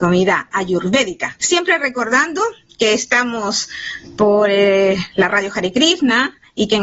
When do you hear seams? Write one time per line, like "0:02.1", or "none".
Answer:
0:01.4

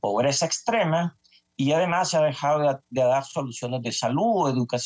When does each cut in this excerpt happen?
none

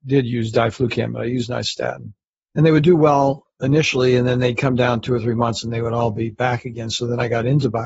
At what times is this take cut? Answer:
none

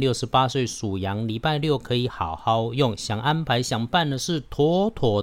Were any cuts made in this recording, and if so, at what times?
none

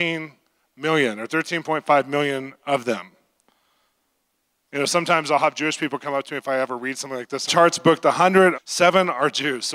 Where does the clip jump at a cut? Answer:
0:07.5
0:08.5

